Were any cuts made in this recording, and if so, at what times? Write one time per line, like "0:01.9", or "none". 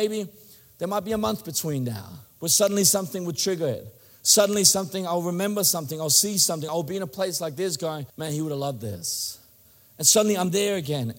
0:06.7
0:08.1